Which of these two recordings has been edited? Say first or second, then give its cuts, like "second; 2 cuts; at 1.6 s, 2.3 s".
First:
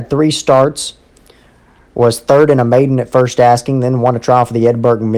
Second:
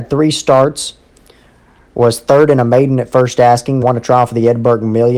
second; 1 cut; at 3.8 s